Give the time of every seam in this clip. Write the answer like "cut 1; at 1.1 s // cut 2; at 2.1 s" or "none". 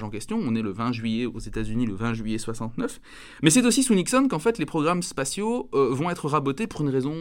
none